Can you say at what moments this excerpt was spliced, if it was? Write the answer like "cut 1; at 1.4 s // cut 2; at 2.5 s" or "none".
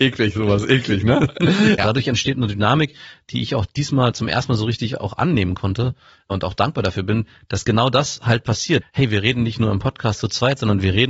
cut 1; at 1.8 s // cut 2; at 8.8 s